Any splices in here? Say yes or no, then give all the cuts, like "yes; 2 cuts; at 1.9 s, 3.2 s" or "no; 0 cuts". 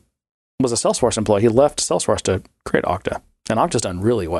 no; 0 cuts